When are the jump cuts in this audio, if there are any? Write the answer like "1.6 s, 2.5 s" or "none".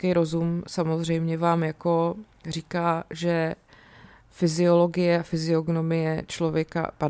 none